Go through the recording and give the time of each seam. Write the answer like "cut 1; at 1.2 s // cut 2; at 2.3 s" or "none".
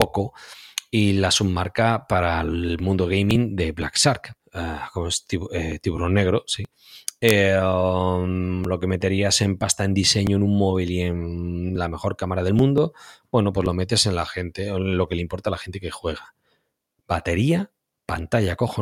cut 1; at 4.4 s